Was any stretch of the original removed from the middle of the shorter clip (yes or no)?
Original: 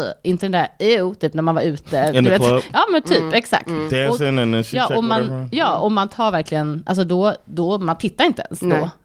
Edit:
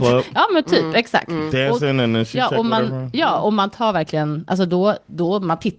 no